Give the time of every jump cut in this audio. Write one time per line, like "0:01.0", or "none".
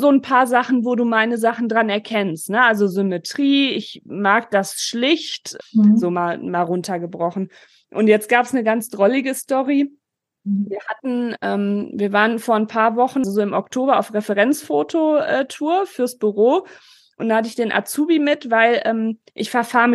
0:05.6
0:13.2